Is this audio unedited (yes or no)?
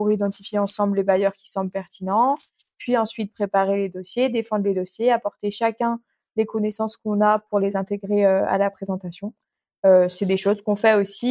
yes